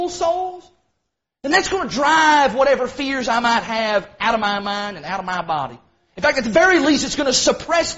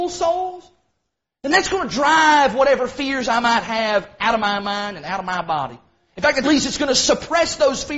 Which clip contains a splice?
second; 1 cut; at 6.4 s

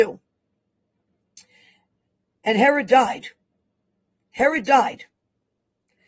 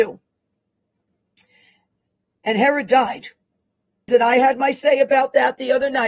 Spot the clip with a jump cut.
second; 1 cut; at 4.1 s

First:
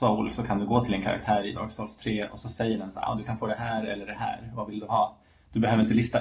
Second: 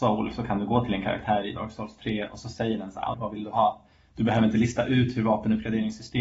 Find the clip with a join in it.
second; 1 cut; at 3.1 s

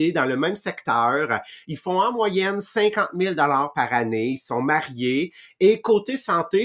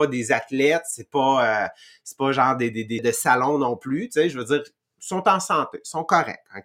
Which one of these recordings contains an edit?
second; 1 cut; at 3.0 s

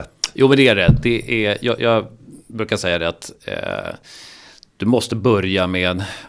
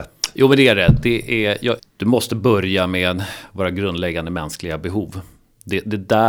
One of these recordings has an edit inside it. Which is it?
second; 1 cut; at 1.8 s

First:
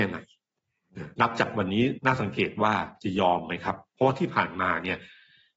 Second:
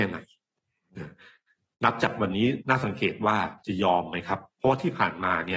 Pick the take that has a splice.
first; 1 cut; at 1.1 s

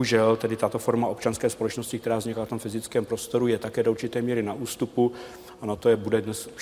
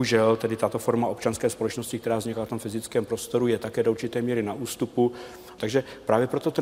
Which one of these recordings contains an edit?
second; 1 cut; at 5.6 s

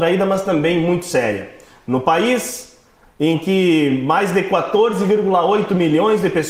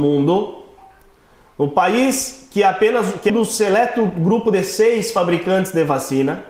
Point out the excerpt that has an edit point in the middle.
second; 1 cut; at 3.3 s

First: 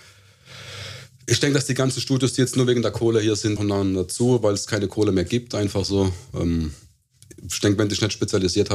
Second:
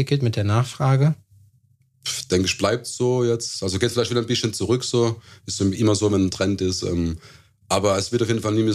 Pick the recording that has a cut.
first; 1 cut; at 3.6 s

